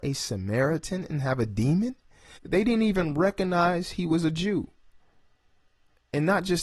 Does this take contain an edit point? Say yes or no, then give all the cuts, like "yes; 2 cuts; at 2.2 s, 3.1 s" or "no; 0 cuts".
yes; 1 cut; at 2.4 s